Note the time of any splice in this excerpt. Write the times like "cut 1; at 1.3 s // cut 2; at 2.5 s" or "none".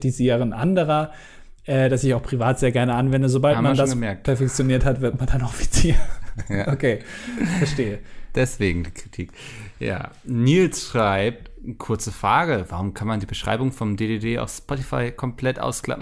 none